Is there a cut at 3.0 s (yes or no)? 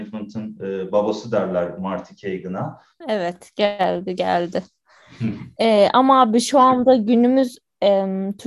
yes